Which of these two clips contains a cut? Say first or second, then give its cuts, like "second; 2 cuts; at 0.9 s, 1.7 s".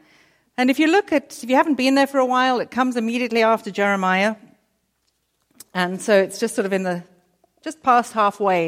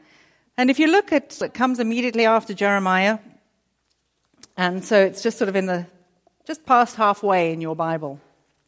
second; 1 cut; at 1.4 s